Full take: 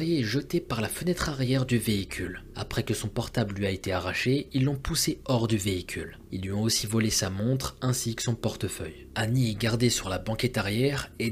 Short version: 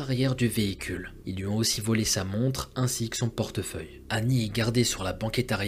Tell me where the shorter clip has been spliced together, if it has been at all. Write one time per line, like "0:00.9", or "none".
0:01.2